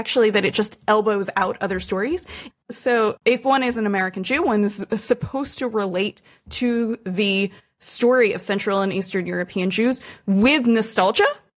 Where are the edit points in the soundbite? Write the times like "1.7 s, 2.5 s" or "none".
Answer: 2.5 s

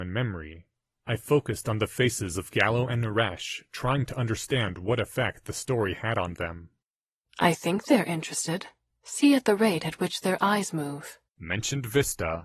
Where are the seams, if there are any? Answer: 1.0 s

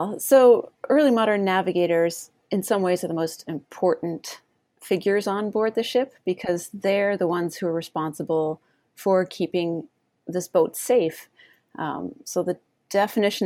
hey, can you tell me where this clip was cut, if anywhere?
none

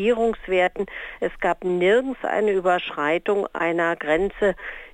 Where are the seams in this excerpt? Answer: none

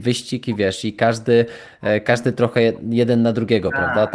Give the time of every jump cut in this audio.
none

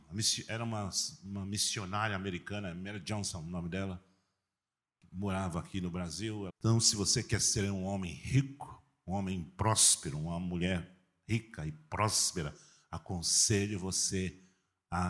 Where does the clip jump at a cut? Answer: 6.5 s

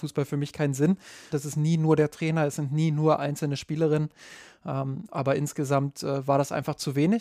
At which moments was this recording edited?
1.3 s

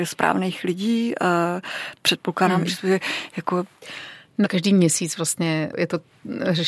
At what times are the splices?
2.7 s, 4.4 s

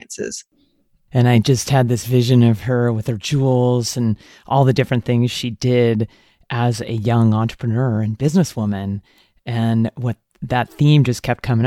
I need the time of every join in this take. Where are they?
1.1 s

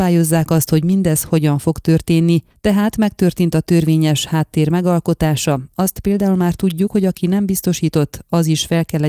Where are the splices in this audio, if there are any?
none

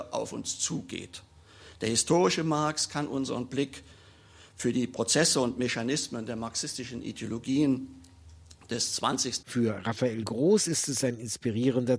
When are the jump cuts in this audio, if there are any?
9.4 s

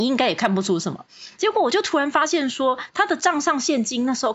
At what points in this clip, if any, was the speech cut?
1.4 s

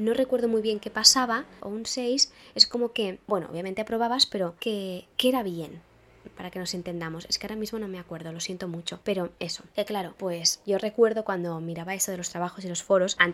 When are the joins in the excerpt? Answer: 1.6 s

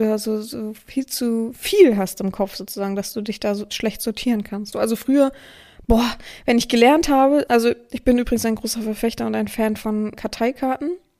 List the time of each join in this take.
4.7 s, 7.5 s, 10.1 s

